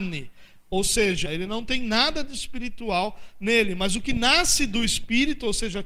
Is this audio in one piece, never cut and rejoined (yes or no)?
no